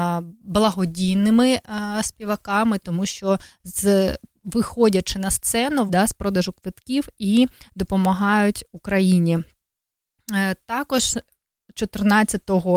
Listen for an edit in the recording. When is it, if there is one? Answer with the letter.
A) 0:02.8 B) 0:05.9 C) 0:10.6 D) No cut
B